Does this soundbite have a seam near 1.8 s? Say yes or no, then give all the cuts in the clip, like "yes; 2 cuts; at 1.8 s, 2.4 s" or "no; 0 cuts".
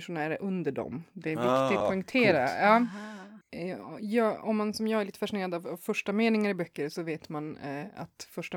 yes; 1 cut; at 1.8 s